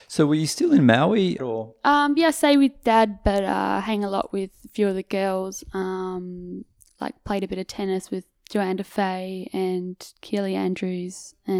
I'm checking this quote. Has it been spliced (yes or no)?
yes